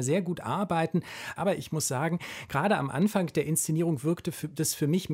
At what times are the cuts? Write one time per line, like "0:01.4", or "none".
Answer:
0:01.4